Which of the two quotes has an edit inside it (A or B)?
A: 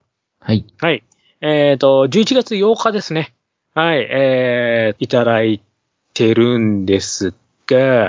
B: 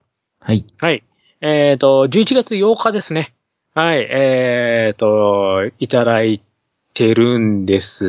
A